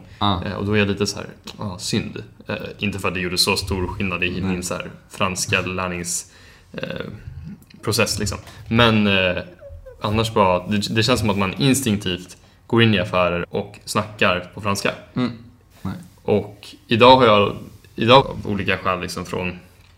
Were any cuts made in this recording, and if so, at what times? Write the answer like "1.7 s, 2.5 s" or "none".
13.4 s, 15.7 s, 18.2 s

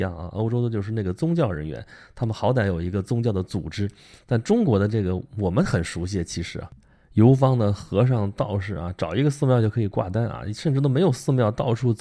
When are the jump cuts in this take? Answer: none

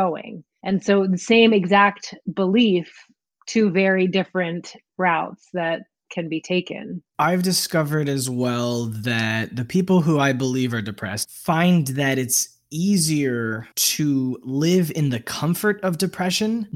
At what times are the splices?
11.2 s, 13.7 s

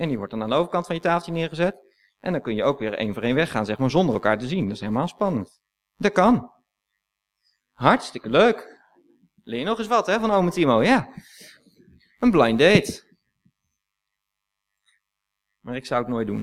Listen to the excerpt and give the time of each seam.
none

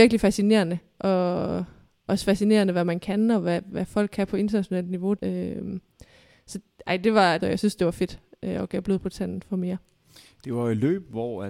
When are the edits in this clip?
5.2 s, 7.4 s

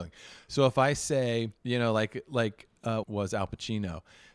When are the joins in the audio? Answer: 1.6 s, 3.0 s

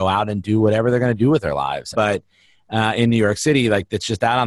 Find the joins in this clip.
1.9 s

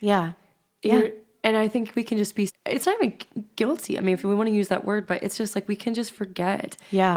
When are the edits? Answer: 2.5 s

